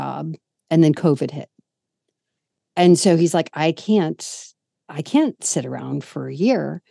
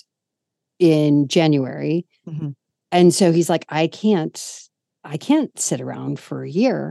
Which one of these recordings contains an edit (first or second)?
second